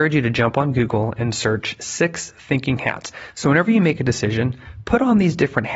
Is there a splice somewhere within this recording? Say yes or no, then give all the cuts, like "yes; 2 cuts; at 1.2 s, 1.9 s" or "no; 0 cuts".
no; 0 cuts